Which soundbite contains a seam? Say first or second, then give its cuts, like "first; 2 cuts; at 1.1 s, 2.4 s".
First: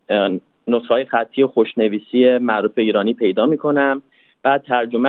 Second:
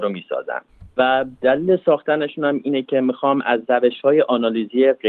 second; 1 cut; at 0.9 s